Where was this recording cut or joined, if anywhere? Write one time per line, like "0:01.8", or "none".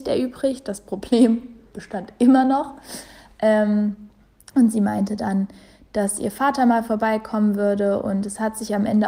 none